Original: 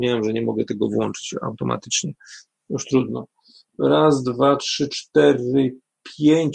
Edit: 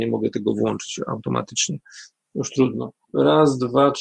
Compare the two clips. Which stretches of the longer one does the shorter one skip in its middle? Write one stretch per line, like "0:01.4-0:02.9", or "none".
0:03.4-0:03.7